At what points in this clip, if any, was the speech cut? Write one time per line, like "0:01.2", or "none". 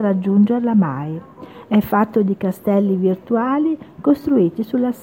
none